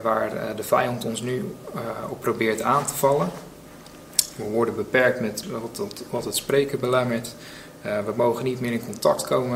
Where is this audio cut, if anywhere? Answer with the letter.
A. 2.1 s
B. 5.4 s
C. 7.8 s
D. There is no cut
B